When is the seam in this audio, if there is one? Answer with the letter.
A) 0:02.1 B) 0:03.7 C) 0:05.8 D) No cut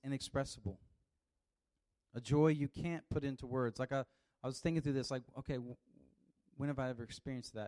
D